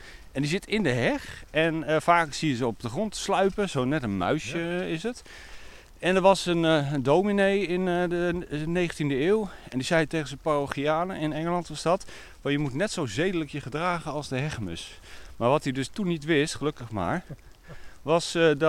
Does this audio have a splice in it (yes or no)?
no